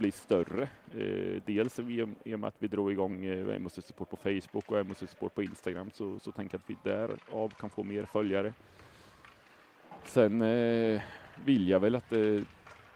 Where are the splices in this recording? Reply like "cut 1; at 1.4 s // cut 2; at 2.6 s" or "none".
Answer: none